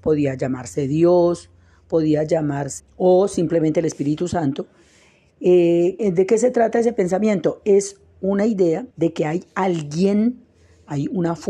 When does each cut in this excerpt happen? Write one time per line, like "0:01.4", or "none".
0:02.8
0:06.0
0:08.9